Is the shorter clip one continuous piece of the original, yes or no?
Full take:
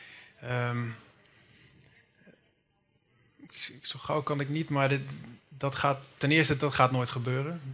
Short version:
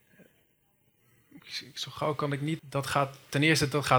no